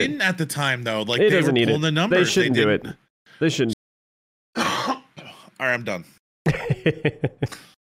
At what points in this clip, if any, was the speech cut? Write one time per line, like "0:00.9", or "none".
0:03.7